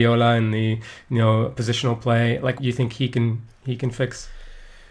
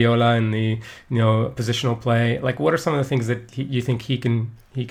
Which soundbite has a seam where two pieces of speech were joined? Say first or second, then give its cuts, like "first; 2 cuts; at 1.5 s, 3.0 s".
first; 1 cut; at 2.6 s